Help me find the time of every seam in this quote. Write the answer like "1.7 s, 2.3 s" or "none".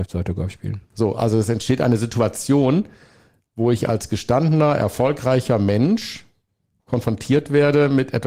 0.9 s